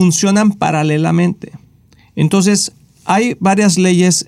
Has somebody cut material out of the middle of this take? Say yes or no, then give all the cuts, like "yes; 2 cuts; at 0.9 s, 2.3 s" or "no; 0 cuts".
no; 0 cuts